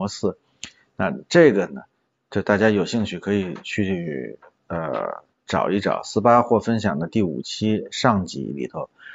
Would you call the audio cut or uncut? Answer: uncut